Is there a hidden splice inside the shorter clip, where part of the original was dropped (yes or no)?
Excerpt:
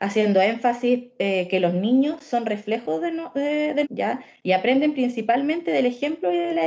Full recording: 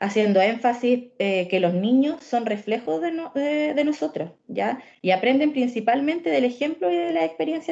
yes